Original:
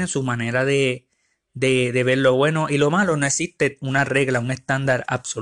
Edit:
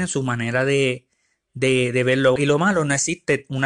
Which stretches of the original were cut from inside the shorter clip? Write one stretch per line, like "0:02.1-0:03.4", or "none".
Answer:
0:02.4-0:02.7